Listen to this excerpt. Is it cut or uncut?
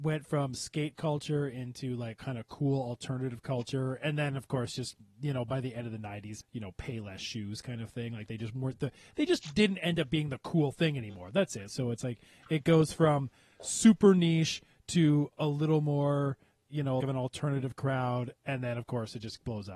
cut